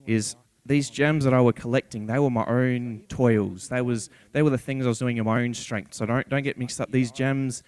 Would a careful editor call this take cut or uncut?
cut